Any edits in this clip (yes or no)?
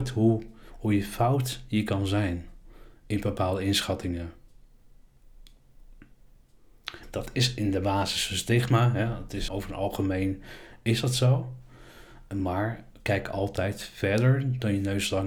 yes